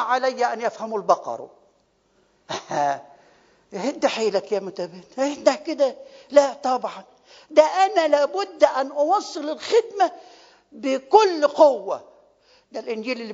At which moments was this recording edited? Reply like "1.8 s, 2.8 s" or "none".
none